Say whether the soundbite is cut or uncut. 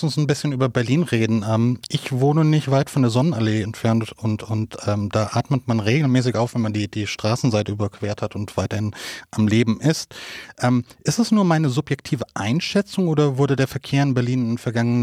uncut